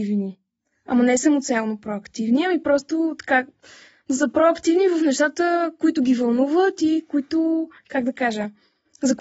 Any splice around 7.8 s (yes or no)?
yes